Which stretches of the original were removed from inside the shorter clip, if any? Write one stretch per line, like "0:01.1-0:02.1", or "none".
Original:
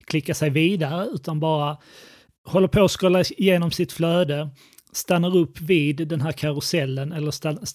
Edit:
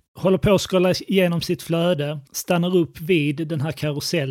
0:04.6-0:04.9